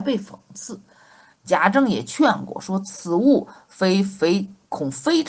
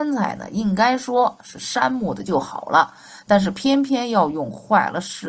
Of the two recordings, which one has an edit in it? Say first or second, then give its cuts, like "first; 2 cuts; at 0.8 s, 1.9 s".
first; 1 cut; at 1.3 s